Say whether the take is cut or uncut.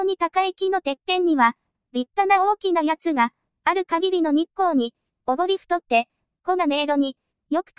cut